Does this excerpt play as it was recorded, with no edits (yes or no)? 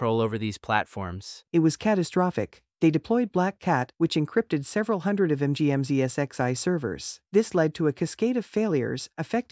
no